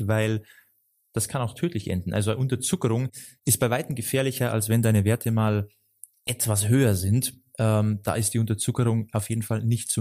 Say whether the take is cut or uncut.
uncut